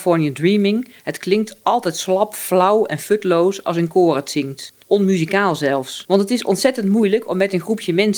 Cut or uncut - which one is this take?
cut